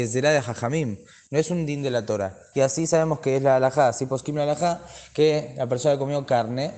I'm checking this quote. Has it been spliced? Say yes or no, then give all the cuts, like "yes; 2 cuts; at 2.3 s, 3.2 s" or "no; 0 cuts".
yes; 1 cut; at 2.5 s